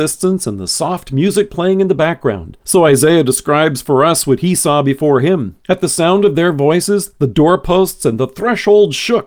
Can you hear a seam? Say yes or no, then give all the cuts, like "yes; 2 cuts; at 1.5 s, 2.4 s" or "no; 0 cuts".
yes; 2 cuts; at 2.6 s, 5.6 s